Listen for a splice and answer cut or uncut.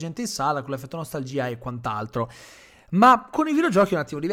uncut